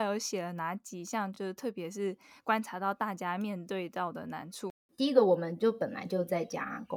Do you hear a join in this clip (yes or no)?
no